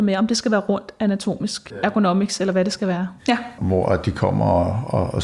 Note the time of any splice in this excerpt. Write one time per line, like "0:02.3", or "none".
0:03.2